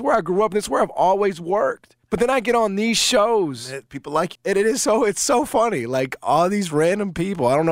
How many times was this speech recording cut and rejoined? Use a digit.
2